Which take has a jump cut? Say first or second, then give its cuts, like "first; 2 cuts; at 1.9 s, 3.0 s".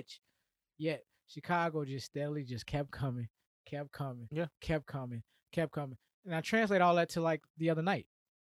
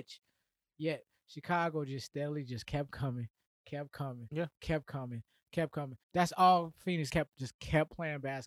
second; 2 cuts; at 6.0 s, 7.1 s